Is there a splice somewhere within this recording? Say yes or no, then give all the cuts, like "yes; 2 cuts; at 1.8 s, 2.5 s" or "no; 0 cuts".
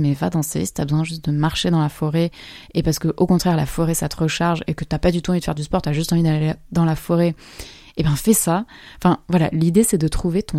no; 0 cuts